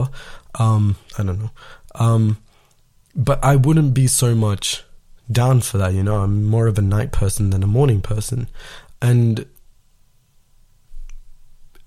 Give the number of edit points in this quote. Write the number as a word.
one